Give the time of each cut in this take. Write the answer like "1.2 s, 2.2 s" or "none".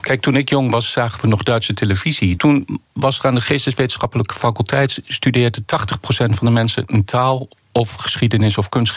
2.4 s

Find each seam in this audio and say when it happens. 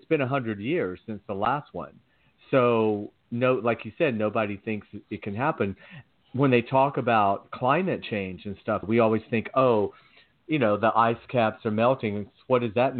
8.8 s

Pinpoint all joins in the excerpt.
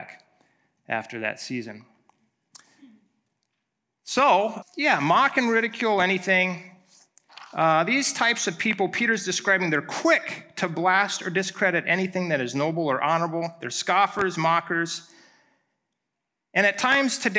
4.6 s

